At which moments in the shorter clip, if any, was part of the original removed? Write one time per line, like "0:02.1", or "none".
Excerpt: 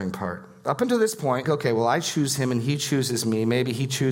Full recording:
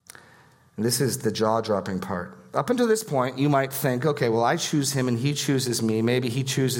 0:01.4